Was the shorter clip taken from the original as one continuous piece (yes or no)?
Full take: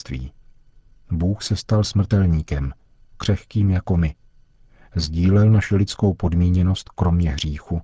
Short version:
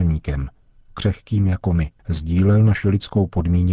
no